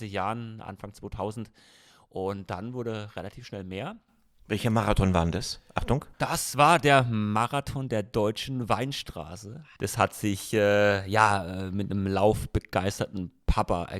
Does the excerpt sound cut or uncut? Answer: cut